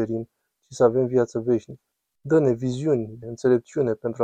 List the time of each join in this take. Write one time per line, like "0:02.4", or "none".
0:02.2
0:03.2